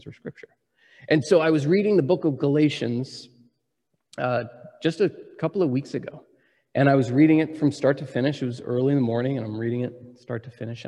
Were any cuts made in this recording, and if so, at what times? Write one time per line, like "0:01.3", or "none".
none